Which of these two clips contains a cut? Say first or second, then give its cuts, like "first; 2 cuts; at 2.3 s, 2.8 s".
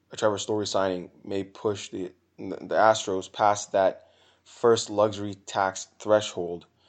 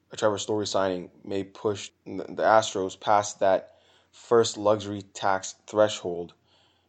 second; 1 cut; at 1.9 s